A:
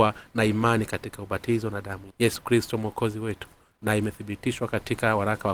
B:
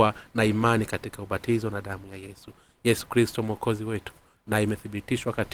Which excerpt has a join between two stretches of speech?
A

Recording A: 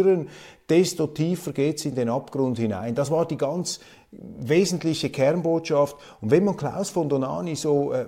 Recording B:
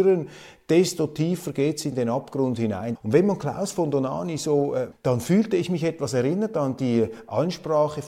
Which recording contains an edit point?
B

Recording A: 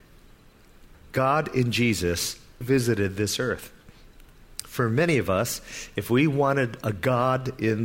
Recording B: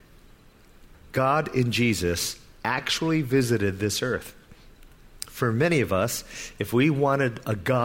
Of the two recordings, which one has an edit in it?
A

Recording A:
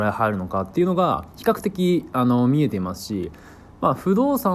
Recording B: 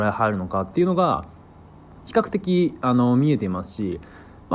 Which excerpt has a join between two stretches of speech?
A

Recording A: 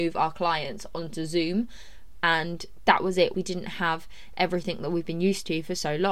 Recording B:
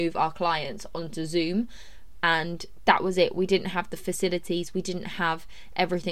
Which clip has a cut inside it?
A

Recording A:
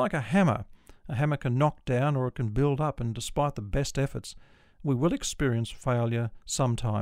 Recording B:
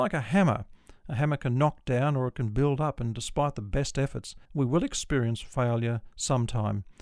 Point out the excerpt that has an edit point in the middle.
B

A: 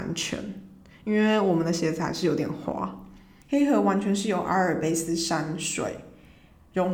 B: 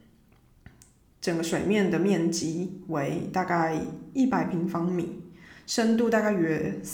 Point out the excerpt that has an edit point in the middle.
A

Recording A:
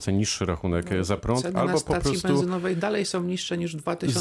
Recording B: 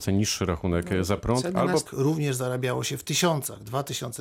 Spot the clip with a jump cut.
B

